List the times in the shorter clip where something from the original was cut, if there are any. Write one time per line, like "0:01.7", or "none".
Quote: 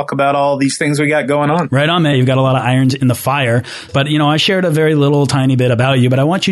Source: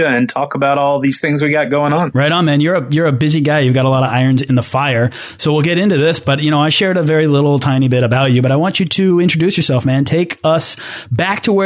0:02.1
0:03.9